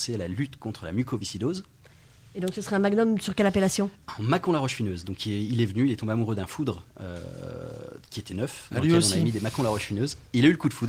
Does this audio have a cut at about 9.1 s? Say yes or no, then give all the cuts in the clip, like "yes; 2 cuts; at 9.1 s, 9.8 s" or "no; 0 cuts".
no; 0 cuts